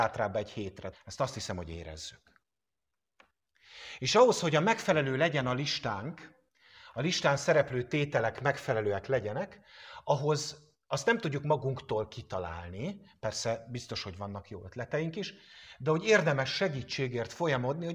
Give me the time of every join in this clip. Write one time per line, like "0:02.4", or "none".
0:00.9